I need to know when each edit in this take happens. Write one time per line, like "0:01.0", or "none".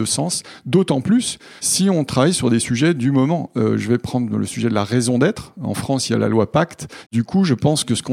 0:07.1